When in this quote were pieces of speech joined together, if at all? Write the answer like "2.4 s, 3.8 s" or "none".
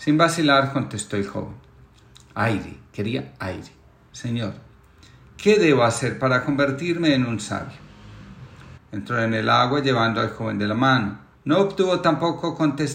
4.1 s, 8.8 s, 11.3 s